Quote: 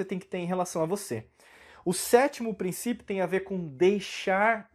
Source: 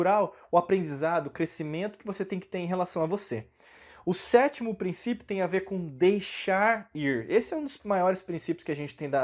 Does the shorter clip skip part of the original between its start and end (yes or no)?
no